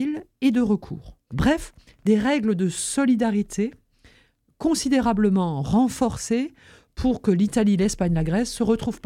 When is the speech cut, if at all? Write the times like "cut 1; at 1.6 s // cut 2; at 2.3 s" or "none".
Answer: cut 1; at 1.3 s